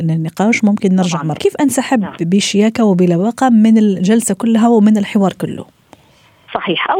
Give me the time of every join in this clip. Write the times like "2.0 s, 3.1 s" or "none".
1.4 s